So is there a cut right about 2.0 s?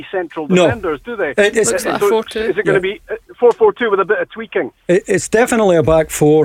yes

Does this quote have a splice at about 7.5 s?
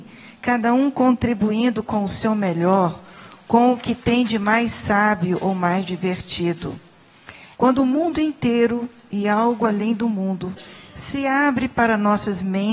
yes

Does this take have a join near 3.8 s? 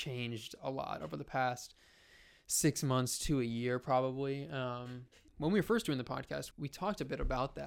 no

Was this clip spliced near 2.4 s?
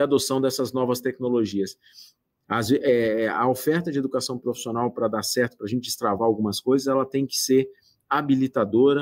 yes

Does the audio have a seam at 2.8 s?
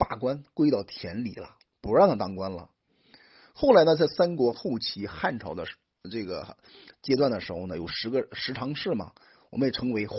no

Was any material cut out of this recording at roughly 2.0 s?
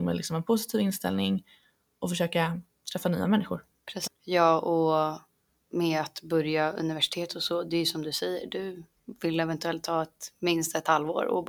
no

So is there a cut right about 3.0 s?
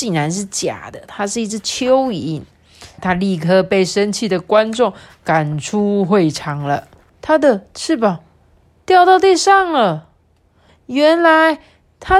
yes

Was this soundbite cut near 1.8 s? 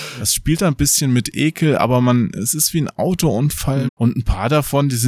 no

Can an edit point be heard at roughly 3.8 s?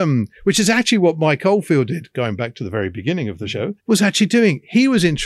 yes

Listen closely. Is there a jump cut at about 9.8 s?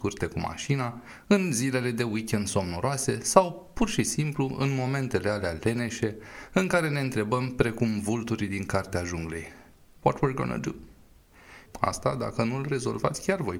no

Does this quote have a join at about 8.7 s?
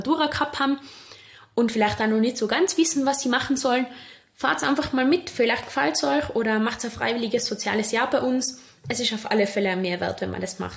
no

